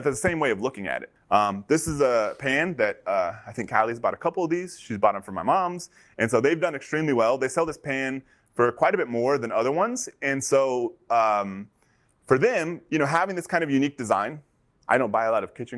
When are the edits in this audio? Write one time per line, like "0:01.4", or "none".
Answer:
0:01.2